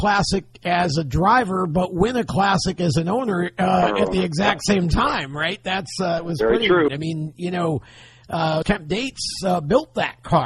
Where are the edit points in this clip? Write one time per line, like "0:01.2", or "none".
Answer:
0:06.9
0:08.6